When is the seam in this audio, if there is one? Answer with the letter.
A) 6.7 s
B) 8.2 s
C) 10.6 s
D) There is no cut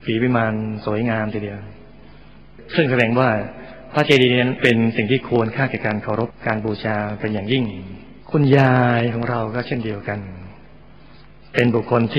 B